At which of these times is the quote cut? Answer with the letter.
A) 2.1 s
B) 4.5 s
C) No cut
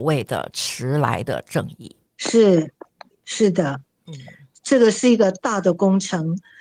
A